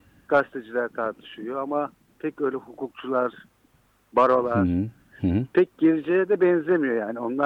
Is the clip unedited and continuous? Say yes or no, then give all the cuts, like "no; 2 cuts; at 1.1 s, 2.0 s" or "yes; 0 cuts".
no; 1 cut; at 5.1 s